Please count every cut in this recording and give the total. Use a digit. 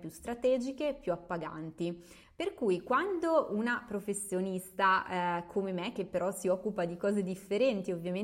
1